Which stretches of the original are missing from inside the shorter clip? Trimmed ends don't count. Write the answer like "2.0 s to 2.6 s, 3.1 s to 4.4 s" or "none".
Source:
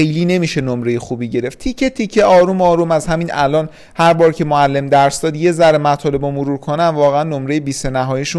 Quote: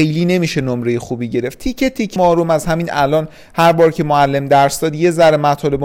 2.2 s to 2.6 s